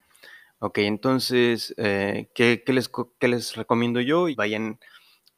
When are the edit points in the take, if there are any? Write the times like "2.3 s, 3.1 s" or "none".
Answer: 4.3 s